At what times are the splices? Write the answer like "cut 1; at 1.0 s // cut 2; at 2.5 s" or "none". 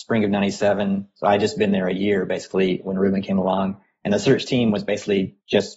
none